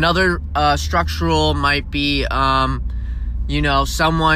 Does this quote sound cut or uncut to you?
uncut